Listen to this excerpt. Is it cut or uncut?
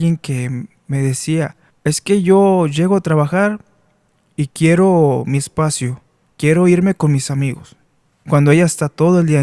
uncut